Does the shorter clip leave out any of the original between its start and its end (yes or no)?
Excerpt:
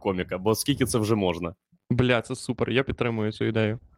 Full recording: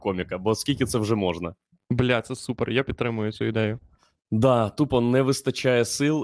no